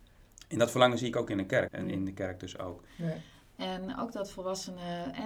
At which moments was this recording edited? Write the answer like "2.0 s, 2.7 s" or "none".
1.7 s, 2.9 s

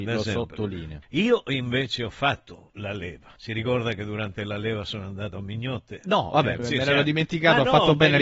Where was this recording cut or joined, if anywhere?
1.0 s, 3.4 s, 6.6 s

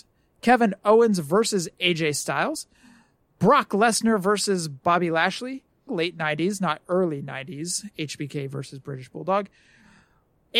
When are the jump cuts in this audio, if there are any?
5.9 s

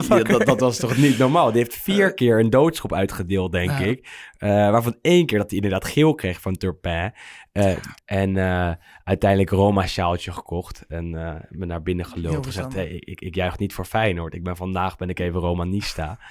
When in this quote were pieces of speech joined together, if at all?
7.9 s

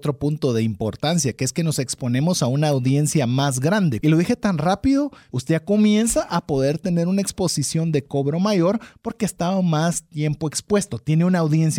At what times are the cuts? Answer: 4.0 s, 5.3 s

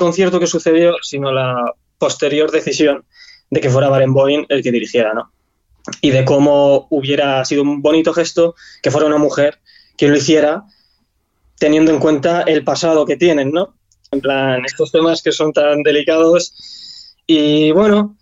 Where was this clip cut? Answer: 14.1 s

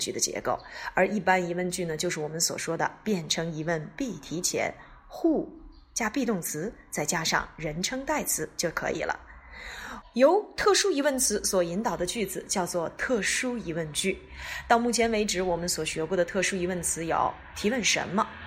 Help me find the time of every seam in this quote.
10.0 s

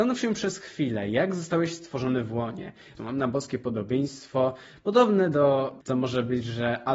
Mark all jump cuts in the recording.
3.0 s, 5.8 s

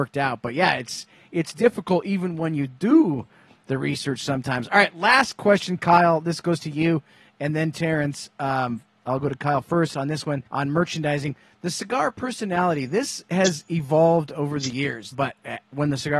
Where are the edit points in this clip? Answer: 10.5 s, 15.1 s

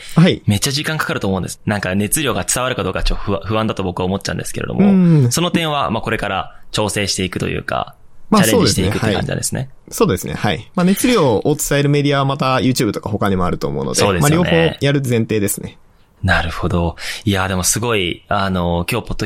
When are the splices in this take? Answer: 1.6 s

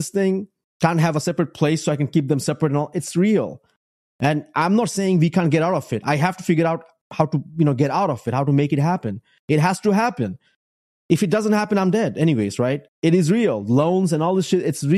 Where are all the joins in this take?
12.9 s

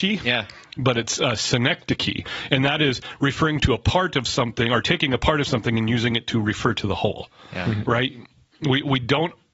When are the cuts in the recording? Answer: 7.8 s

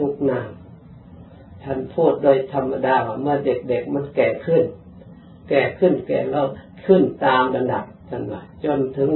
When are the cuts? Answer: 8.0 s

